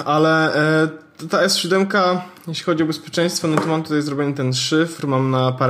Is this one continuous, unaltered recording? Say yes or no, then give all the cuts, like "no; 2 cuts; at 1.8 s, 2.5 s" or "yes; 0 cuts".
yes; 0 cuts